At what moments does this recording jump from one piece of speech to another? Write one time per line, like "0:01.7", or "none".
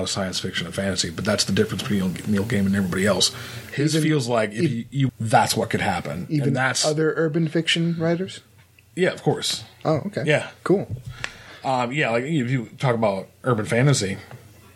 0:05.1